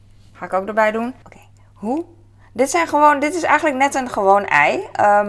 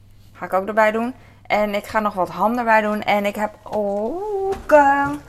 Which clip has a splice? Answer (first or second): first